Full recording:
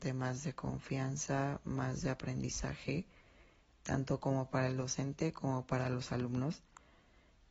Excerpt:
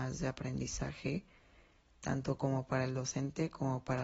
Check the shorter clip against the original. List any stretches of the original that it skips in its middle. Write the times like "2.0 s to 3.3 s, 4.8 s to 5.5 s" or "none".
none